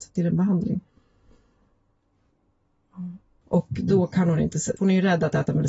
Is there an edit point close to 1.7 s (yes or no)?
no